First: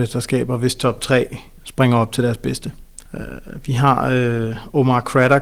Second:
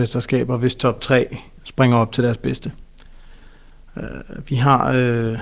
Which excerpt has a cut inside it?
first; 1 cut; at 3.1 s

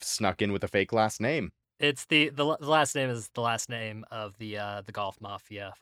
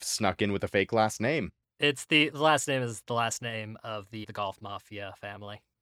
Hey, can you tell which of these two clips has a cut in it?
second; 2 cuts; at 2.3 s, 4.2 s

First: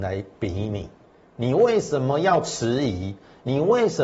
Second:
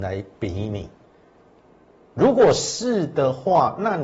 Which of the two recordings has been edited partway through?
first; 1 cut; at 1.3 s

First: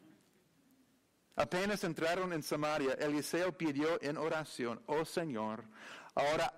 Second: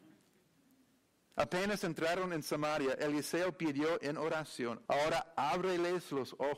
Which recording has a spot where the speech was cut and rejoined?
second; 1 cut; at 4.9 s

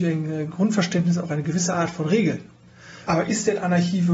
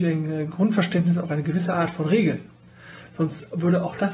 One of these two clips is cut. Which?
first; 1 cut; at 3.1 s

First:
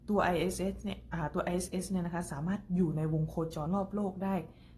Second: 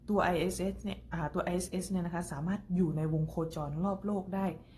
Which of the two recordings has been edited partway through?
first; 1 cut; at 3.7 s

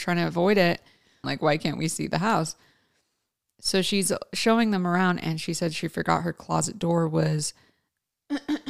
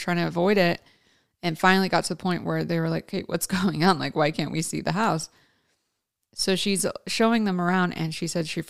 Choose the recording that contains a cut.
first; 1 cut; at 1.2 s

